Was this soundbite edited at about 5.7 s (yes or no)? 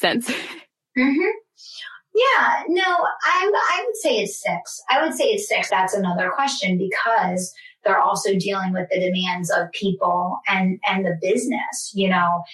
yes